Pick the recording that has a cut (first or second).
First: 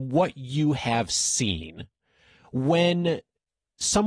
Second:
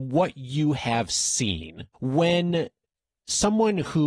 second